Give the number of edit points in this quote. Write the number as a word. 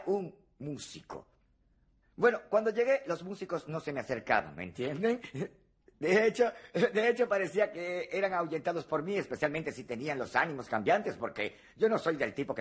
one